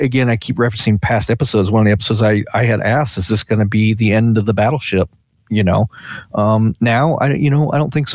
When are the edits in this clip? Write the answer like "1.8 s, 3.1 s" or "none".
none